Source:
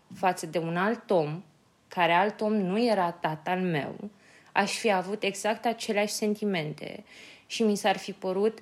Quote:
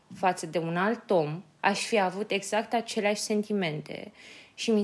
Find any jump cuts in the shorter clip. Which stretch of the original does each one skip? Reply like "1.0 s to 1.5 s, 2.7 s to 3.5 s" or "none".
1.6 s to 4.5 s